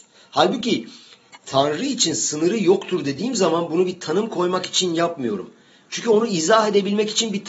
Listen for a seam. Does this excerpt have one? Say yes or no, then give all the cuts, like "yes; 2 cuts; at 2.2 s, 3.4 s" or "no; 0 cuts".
no; 0 cuts